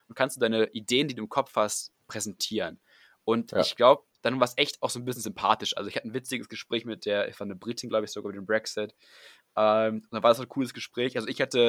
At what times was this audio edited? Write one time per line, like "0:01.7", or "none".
none

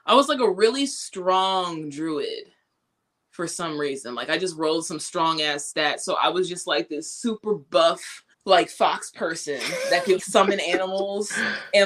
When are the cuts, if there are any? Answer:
0:08.3
0:10.2

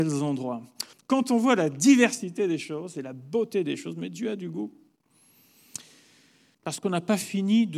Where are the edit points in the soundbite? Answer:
0:00.9
0:06.5

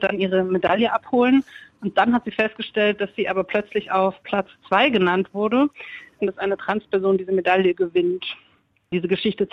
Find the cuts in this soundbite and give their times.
0:06.2

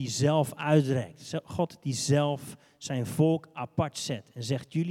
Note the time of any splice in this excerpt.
none

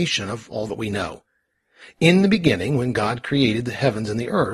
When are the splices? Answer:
none

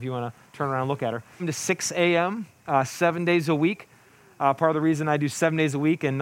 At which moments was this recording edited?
0:01.4

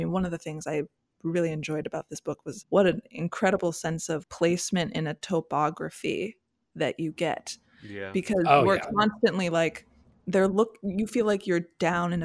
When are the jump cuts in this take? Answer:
none

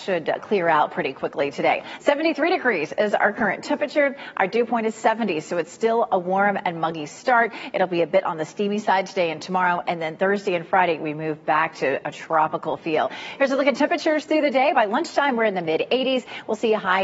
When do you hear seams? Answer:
none

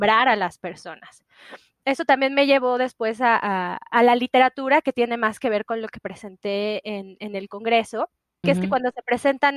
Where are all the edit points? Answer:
0:08.4

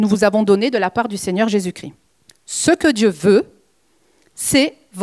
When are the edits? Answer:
none

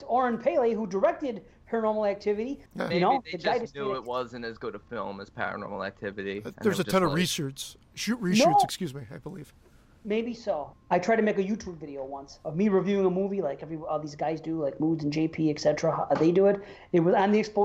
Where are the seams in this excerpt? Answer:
0:02.7
0:10.7

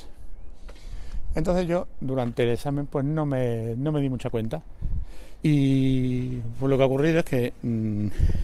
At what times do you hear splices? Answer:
0:05.4

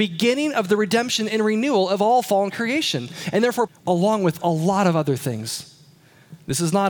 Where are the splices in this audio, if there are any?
0:03.7

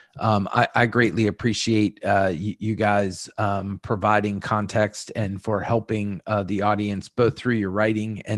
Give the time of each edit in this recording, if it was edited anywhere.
none

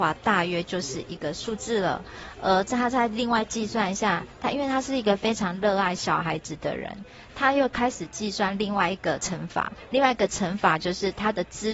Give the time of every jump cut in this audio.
none

